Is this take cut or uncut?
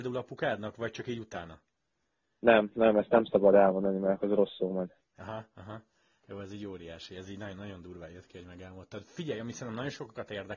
uncut